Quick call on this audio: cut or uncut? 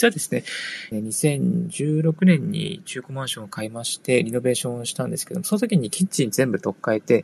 cut